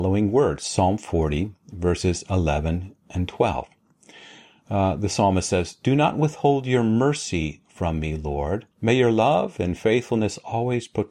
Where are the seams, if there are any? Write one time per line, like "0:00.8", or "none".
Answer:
0:08.7